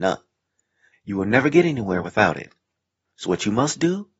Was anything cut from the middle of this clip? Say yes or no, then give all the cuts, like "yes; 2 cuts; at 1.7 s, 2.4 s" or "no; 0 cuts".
yes; 1 cut; at 0.9 s